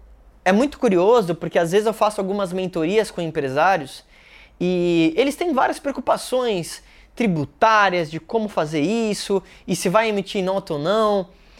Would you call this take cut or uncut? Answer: uncut